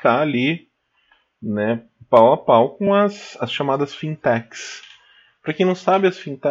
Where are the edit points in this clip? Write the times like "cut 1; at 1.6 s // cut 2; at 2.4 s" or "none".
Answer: none